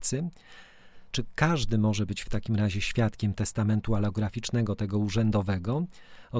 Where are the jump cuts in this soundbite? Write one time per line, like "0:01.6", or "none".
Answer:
0:01.1